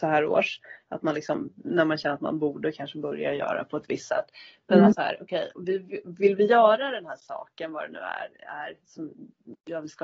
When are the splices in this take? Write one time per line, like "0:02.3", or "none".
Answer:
0:04.9